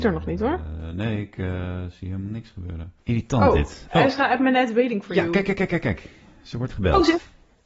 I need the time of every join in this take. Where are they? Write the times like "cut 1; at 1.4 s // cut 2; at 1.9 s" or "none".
cut 1; at 3.0 s